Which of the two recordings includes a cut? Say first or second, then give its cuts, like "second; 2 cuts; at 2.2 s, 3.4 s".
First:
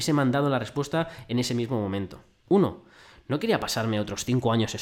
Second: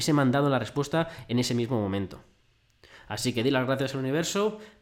first; 1 cut; at 2.4 s